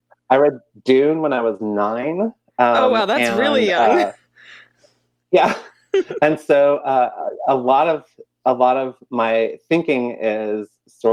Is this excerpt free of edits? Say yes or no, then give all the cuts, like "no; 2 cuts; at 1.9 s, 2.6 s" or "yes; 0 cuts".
yes; 0 cuts